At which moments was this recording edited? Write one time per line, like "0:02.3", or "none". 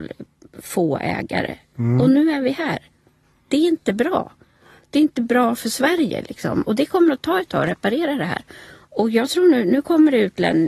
none